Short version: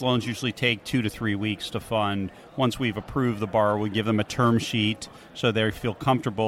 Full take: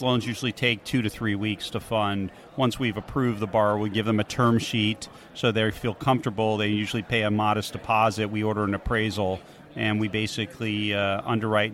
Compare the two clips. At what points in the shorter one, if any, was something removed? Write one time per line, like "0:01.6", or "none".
none

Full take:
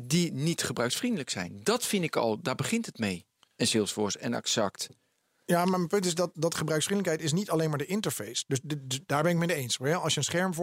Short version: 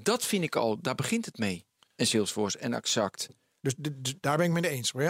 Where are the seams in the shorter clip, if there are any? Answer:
0:03.6

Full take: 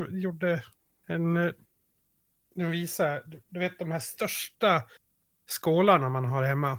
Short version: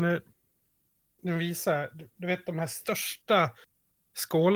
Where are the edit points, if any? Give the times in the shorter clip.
none

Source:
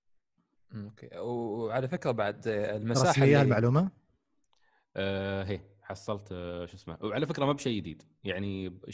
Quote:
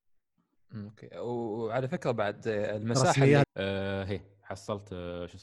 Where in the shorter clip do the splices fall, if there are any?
0:03.4

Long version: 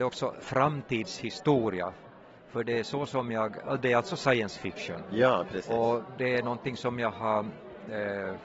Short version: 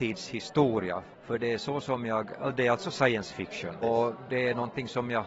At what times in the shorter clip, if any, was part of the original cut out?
0:01.1
0:03.8

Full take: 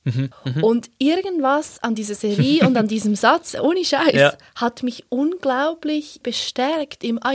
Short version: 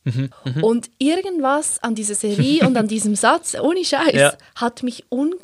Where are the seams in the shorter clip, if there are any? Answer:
none

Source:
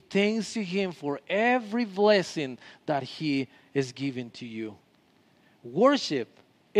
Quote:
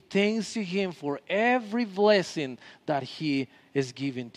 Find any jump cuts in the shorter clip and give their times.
none

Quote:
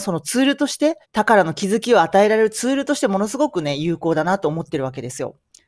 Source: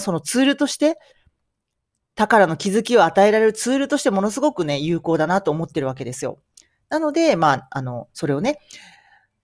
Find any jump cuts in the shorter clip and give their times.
0:01.0

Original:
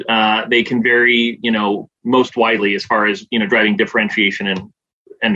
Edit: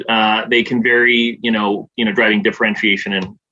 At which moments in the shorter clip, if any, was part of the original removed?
0:01.9

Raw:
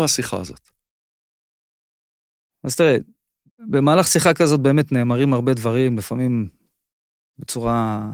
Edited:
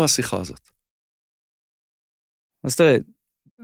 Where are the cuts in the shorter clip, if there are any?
none

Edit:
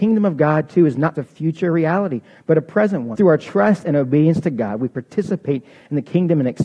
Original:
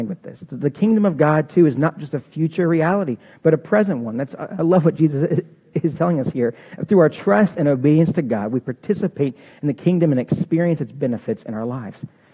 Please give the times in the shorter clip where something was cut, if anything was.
0:01.1
0:03.1

